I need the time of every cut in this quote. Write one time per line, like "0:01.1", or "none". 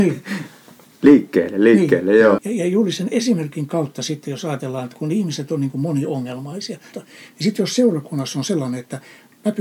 0:02.4
0:06.9